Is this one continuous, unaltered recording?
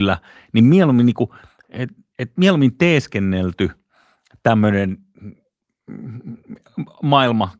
yes; 0 cuts

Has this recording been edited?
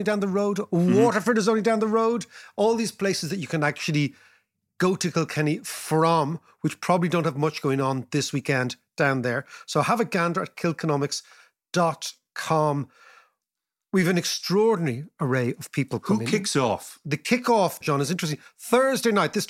yes; 1 cut; at 17.8 s

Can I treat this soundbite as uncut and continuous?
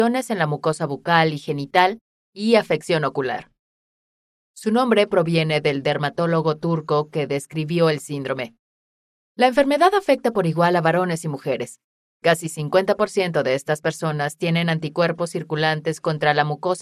no; 1 cut; at 12.1 s

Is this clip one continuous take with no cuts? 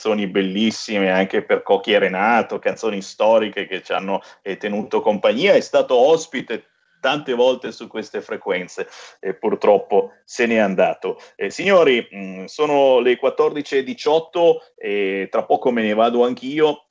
yes; 0 cuts

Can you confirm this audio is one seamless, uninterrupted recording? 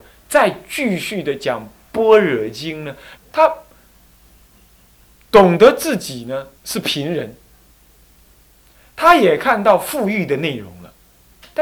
no; 2 cuts; at 3.2 s, 6.6 s

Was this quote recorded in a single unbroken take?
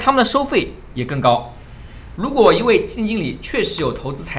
no; 1 cut; at 2.2 s

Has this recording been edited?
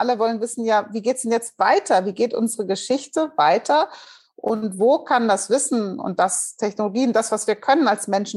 no; 0 cuts

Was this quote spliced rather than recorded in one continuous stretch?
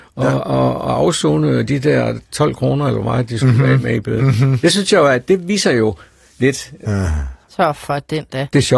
yes; 1 cut; at 6.9 s

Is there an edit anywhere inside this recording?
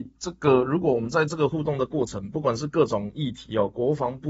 no; 0 cuts

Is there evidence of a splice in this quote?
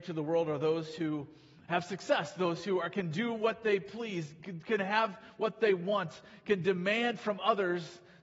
no; 0 cuts

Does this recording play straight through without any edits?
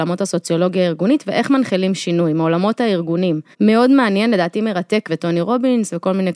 no; 2 cuts; at 3.5 s, 5.1 s

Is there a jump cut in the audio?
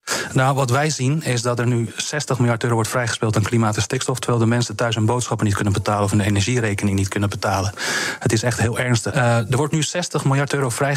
yes; 1 cut; at 9.1 s

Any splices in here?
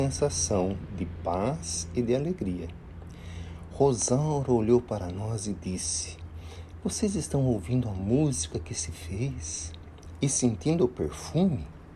no; 0 cuts

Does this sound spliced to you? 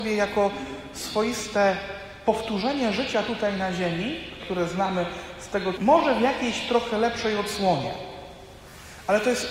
yes; 2 cuts; at 4.4 s, 5.8 s

